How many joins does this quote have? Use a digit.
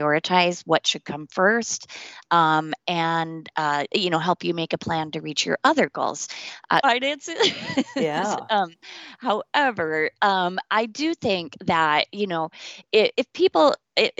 2